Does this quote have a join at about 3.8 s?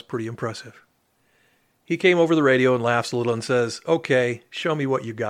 no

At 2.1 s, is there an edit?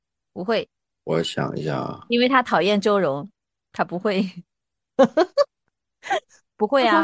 no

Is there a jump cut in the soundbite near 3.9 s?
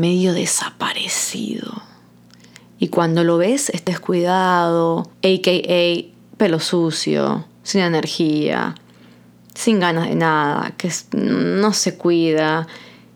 yes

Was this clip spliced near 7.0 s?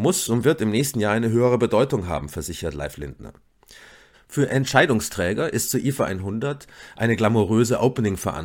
no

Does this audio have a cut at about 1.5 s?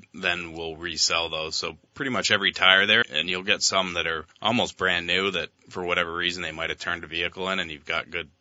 no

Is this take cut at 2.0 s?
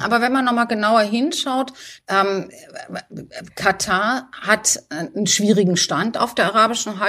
yes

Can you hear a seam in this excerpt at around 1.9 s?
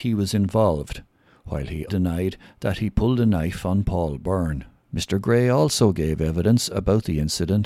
yes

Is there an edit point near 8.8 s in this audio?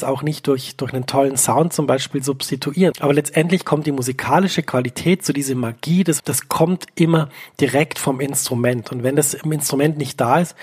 no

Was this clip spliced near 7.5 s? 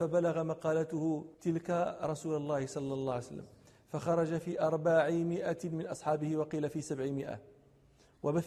no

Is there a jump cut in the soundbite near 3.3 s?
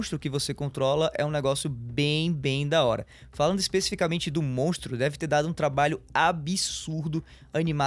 no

